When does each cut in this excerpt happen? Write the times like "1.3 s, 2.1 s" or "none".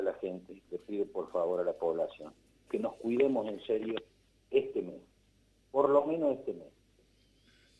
2.7 s